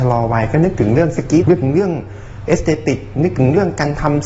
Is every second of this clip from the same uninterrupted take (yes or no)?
no